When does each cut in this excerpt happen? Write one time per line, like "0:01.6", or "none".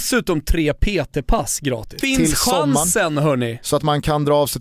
0:02.0